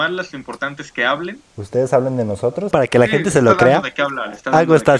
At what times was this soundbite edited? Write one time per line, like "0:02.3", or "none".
0:01.5
0:02.7